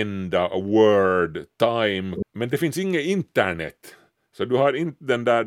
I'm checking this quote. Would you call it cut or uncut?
cut